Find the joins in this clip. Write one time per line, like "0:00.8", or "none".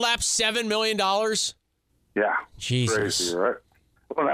none